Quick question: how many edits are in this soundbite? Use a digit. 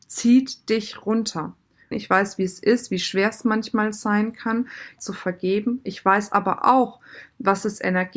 2